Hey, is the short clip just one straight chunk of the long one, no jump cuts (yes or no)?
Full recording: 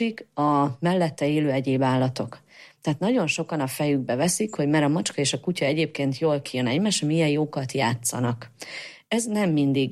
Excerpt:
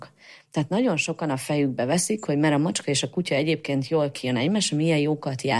yes